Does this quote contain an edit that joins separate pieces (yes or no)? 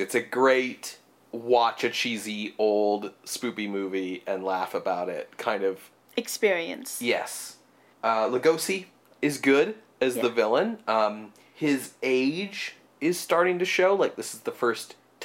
yes